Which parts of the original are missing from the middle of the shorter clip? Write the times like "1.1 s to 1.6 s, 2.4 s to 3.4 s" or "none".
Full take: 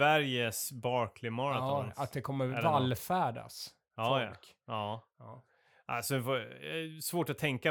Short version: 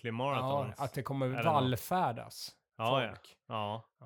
none